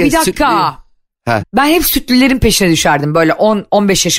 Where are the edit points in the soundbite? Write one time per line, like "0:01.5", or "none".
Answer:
0:01.4